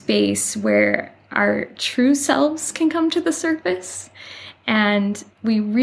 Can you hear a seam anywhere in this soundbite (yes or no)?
no